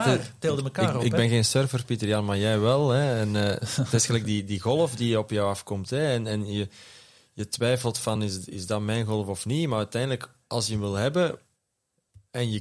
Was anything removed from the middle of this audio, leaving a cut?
no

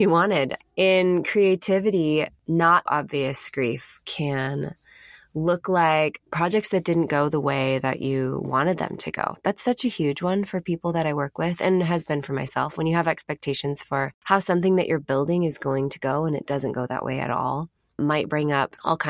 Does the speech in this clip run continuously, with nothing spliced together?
no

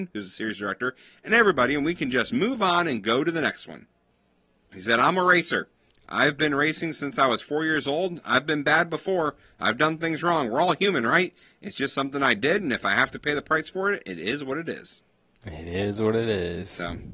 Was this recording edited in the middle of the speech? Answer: yes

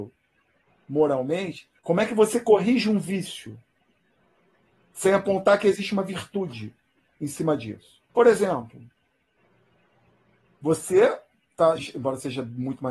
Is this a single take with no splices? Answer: no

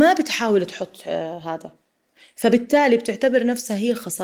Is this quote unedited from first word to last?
yes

